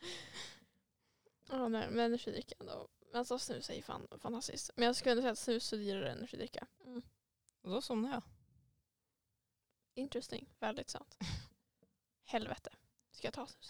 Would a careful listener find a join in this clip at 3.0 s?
no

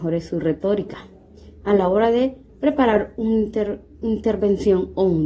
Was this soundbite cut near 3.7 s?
no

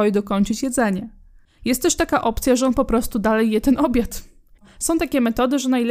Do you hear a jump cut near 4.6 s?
yes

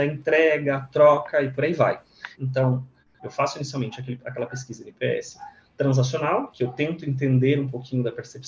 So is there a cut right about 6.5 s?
no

